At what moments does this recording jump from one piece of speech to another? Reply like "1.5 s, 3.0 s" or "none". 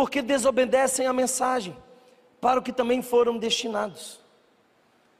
none